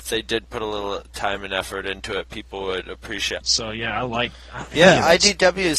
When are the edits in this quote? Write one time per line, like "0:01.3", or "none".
0:03.4